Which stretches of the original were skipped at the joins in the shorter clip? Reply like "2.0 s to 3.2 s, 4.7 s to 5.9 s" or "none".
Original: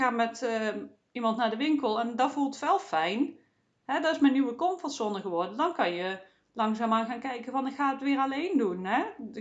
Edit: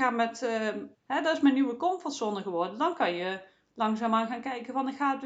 0.9 s to 3.7 s